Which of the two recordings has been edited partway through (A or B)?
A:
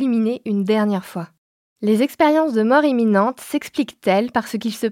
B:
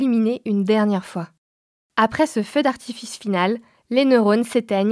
A